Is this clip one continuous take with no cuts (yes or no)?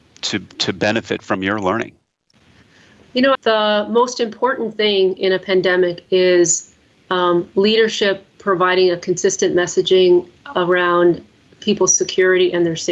no